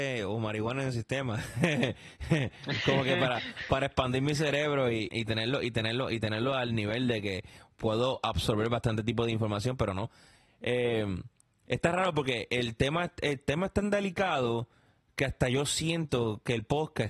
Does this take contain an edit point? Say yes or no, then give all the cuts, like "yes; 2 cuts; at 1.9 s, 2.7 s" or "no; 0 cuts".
yes; 1 cut; at 5.1 s